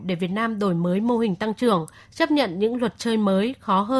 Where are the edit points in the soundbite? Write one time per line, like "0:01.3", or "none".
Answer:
0:02.0